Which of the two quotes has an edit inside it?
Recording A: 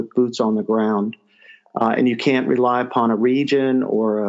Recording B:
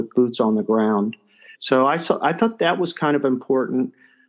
B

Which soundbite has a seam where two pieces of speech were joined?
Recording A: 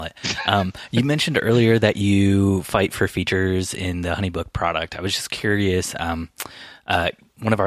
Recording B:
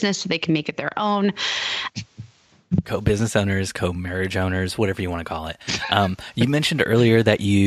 B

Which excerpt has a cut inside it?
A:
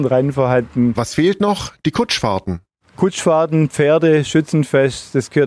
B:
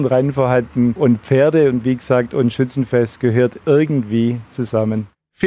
A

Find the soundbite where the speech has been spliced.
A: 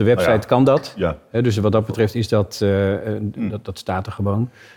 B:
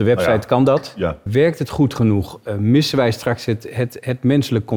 B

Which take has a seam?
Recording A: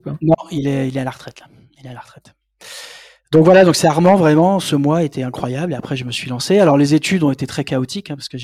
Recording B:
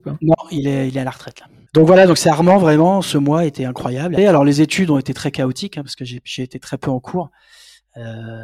B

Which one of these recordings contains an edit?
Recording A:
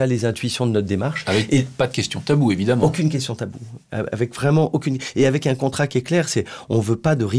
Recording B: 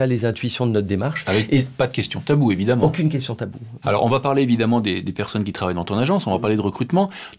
B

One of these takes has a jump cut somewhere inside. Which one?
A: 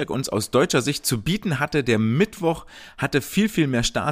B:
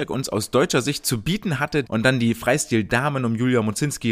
B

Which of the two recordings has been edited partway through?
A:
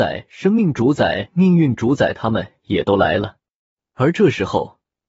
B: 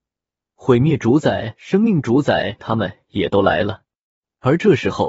B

